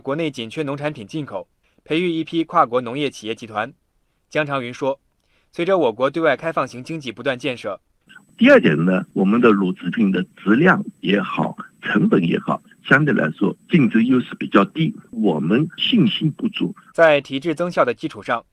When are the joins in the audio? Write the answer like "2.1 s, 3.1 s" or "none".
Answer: 8.1 s, 16.9 s